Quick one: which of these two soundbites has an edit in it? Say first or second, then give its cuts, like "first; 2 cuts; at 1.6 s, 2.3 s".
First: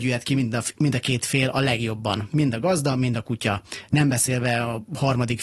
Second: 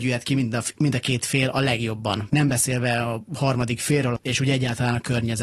second; 2 cuts; at 2.3 s, 4.2 s